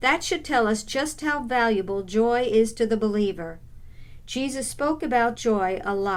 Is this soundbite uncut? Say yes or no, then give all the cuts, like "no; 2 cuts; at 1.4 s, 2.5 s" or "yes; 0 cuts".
yes; 0 cuts